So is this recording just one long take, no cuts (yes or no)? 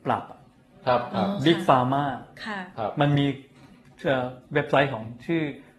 no